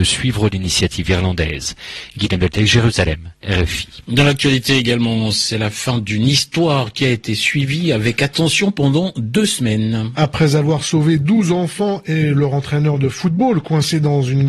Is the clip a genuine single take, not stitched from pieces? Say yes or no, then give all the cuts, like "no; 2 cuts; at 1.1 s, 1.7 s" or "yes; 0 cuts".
yes; 0 cuts